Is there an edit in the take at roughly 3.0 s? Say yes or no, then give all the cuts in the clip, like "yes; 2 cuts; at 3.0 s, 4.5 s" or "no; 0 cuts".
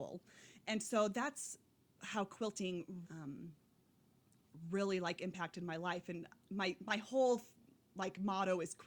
yes; 1 cut; at 3.0 s